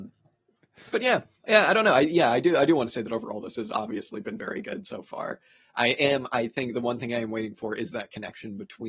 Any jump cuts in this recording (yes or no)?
no